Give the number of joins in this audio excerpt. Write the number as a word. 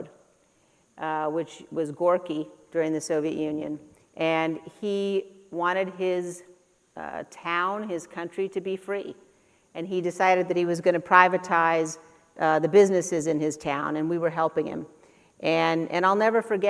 one